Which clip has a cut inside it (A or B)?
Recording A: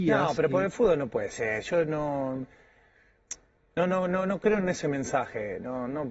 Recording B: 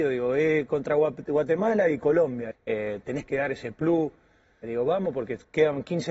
B